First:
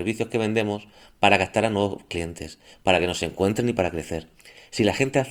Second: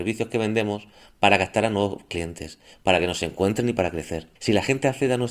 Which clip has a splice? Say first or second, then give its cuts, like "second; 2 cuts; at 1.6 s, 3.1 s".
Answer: second; 1 cut; at 4.4 s